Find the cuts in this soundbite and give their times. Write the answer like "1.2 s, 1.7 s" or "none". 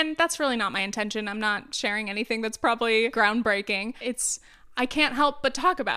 4.0 s